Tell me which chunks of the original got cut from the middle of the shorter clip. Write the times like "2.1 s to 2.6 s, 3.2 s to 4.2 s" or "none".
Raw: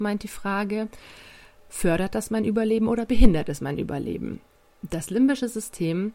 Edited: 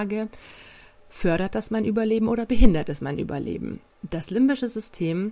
4.5 s to 4.7 s